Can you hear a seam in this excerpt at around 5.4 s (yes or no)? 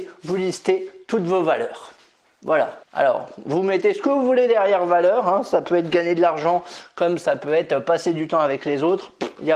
no